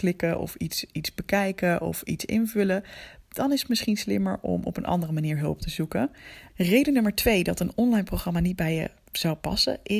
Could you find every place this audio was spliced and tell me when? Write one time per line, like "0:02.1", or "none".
0:06.5